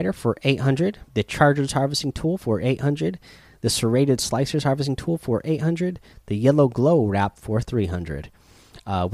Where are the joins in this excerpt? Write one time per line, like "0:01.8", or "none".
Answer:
0:01.1